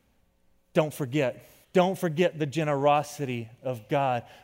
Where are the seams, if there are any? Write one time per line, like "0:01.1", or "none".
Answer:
0:01.6